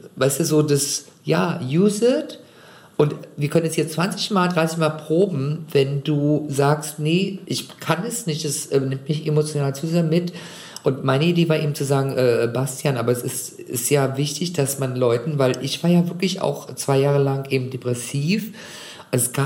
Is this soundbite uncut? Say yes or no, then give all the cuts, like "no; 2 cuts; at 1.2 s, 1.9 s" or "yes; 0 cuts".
yes; 0 cuts